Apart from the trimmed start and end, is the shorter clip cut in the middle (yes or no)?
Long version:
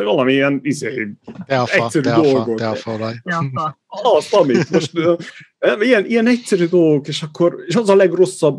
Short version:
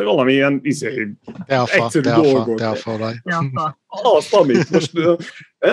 no